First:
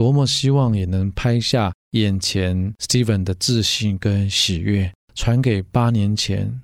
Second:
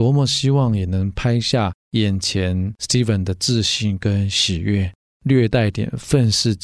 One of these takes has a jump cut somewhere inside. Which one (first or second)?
second